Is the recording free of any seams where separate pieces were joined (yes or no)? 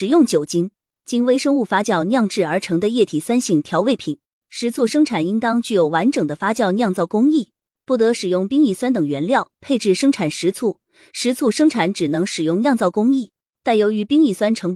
yes